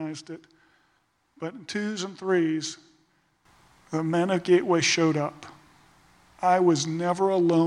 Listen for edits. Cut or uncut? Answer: uncut